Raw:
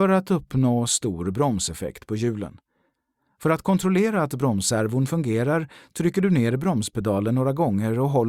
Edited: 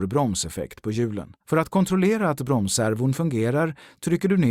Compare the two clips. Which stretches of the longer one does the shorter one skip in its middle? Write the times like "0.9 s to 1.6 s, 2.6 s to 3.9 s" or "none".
2.6 s to 3.3 s